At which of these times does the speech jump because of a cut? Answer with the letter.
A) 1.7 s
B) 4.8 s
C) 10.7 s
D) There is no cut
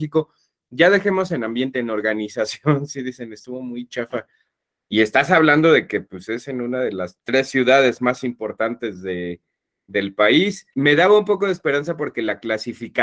C